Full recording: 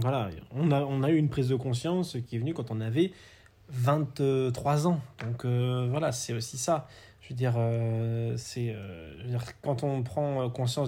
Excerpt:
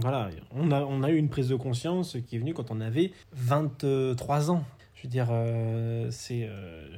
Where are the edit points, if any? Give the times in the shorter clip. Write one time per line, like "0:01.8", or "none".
0:03.2
0:04.8